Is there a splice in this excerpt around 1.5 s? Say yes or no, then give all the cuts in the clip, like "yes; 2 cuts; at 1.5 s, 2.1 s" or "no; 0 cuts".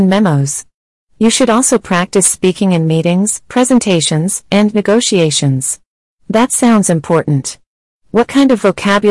no; 1 cut; at 6.2 s